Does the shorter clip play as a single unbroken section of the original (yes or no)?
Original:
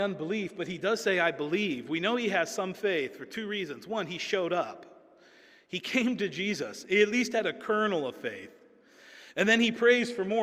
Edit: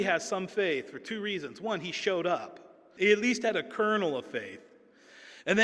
no